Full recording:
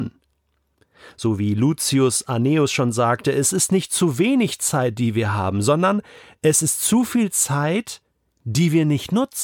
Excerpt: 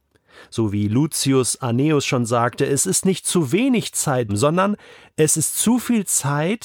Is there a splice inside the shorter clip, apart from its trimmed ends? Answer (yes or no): yes